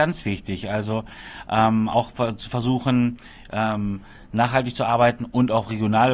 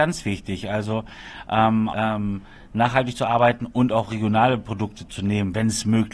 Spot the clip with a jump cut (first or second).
second